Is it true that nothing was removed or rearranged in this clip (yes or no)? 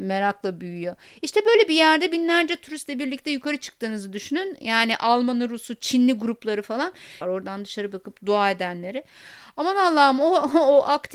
no